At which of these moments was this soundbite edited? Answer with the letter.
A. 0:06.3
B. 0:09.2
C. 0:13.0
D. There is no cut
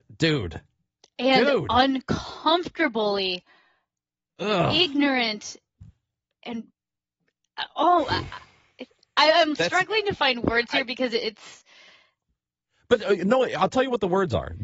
D